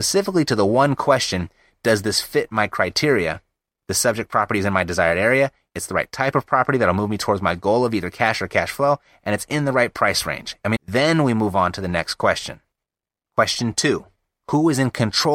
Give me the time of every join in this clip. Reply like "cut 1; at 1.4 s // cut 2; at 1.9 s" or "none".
cut 1; at 10.8 s